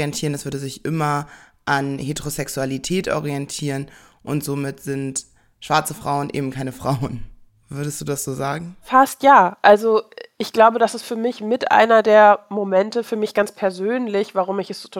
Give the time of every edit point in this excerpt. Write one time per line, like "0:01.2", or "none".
none